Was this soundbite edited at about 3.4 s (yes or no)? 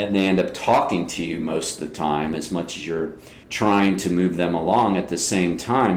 yes